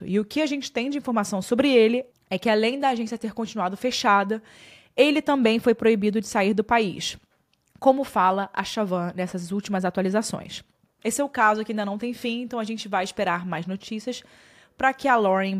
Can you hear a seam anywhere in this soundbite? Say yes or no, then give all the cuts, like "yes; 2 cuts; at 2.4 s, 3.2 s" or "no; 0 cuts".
no; 0 cuts